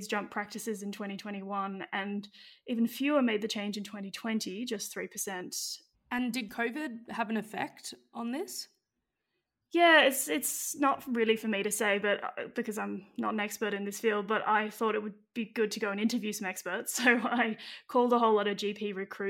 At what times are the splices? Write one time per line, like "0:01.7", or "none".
0:05.9